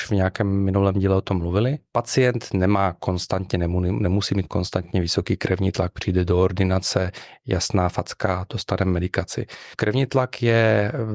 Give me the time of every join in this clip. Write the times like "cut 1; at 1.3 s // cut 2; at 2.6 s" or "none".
none